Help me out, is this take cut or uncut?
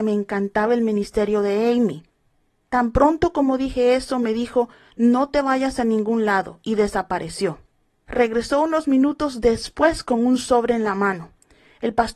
uncut